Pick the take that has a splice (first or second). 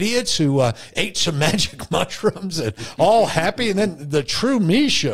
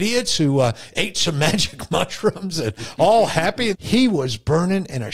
second